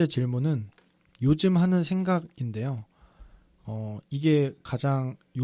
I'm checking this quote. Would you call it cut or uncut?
uncut